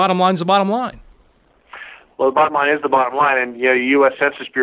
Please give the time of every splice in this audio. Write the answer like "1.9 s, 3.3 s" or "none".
none